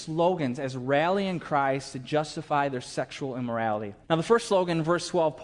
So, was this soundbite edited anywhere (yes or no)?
yes